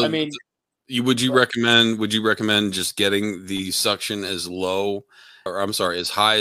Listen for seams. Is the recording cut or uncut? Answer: cut